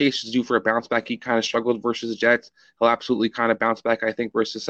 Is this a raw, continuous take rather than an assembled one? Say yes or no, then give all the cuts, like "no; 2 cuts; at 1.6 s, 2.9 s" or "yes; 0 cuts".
yes; 0 cuts